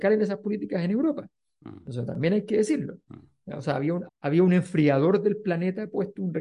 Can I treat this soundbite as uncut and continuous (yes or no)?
no